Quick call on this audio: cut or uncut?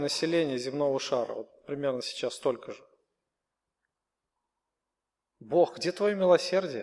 uncut